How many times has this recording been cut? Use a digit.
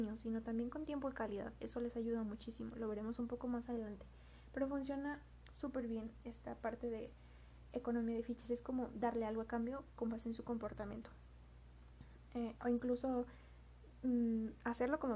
0